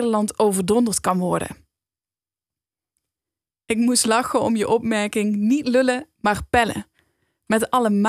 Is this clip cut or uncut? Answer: uncut